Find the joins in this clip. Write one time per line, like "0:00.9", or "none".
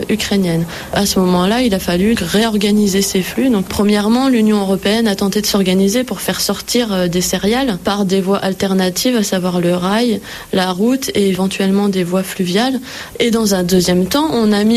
0:02.2

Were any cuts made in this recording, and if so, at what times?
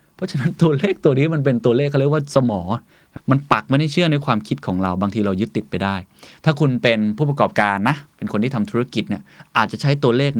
0:03.2

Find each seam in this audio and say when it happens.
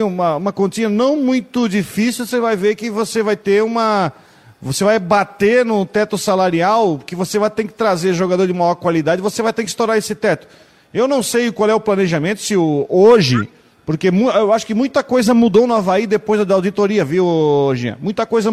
none

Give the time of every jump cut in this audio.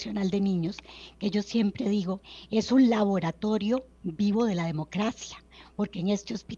none

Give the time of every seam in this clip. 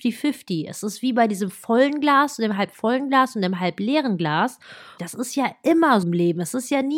0:05.0
0:06.0

